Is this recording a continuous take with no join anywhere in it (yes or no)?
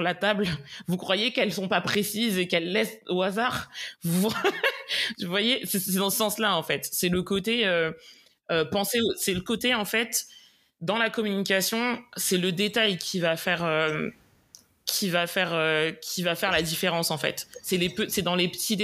yes